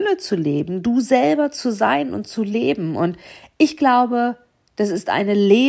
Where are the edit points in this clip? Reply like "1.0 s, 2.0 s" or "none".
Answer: none